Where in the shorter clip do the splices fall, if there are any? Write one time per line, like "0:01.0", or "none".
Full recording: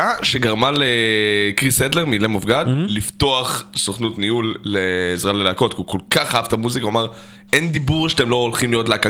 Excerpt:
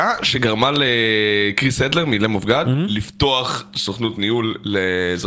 none